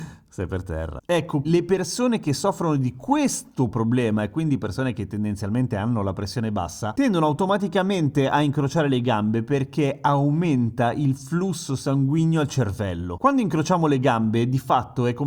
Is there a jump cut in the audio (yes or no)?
yes